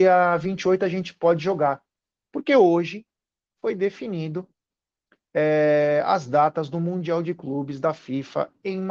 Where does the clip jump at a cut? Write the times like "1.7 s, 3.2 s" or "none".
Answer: 2.3 s